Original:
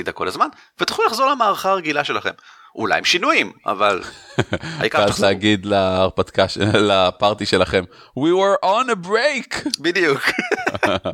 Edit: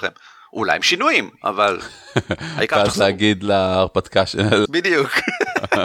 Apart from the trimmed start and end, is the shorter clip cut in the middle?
yes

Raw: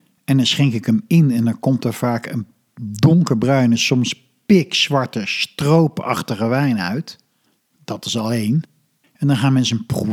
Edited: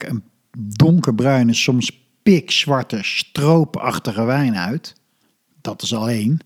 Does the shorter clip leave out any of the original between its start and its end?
no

